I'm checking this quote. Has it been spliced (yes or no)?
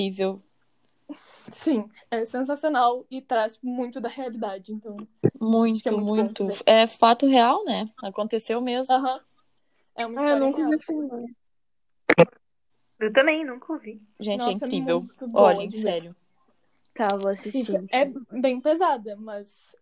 no